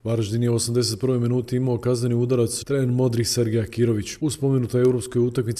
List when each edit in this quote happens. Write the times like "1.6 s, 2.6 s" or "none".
2.6 s, 4.2 s